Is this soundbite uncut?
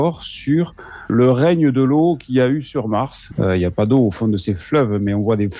no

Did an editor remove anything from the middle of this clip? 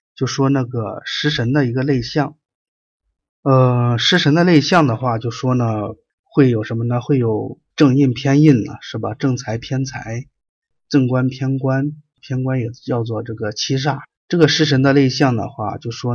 no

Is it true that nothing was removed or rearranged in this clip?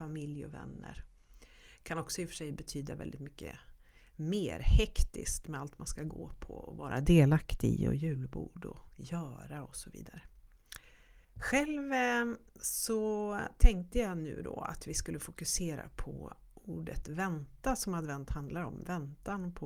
no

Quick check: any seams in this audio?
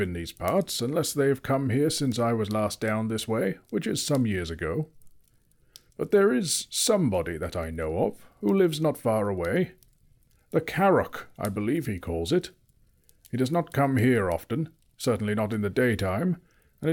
no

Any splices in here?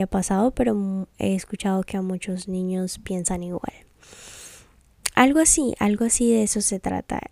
no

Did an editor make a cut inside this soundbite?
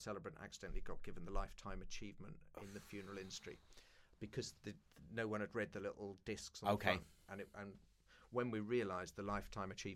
no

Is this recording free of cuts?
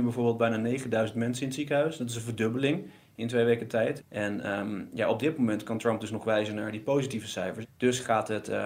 no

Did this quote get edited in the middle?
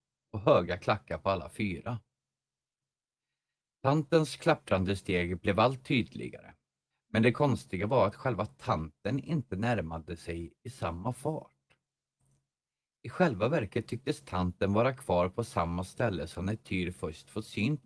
yes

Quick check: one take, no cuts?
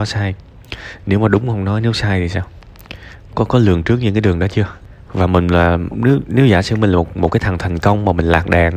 no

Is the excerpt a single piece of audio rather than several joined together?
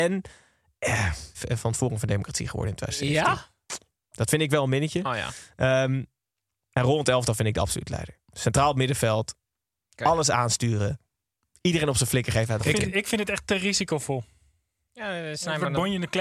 no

